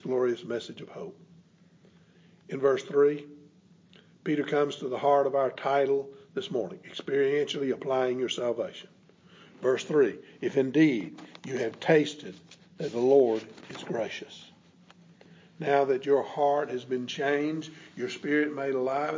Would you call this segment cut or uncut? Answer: uncut